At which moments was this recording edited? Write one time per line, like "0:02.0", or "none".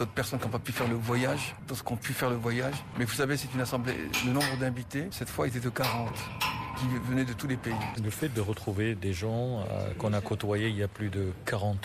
0:08.0